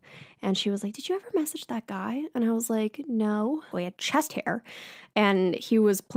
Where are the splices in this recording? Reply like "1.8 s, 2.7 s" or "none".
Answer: 3.7 s